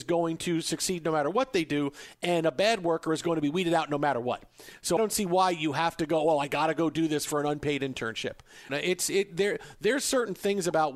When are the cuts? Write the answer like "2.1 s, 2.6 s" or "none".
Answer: 5.0 s, 8.7 s